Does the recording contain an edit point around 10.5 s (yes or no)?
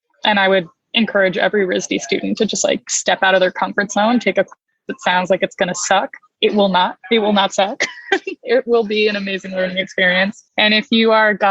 yes